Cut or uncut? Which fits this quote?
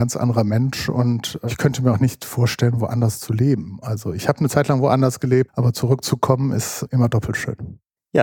cut